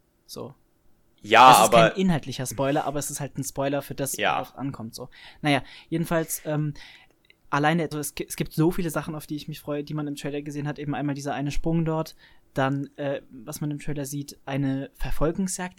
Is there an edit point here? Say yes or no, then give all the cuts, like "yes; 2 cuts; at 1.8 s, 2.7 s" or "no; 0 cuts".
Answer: yes; 1 cut; at 7.9 s